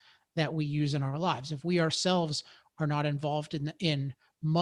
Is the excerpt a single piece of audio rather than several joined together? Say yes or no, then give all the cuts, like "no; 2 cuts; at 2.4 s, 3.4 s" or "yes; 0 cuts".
yes; 0 cuts